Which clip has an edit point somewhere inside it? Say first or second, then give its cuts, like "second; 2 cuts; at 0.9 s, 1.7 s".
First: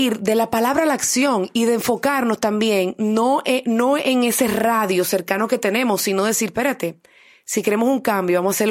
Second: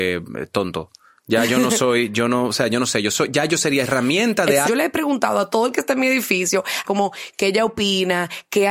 second; 2 cuts; at 4.6 s, 6.8 s